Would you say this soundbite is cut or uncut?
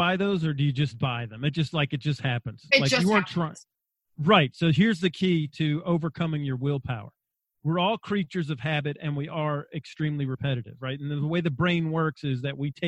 uncut